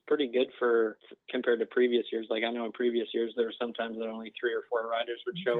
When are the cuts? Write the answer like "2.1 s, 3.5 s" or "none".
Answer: 1.0 s